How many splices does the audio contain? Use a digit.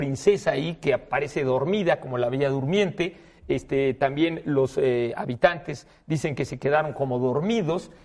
0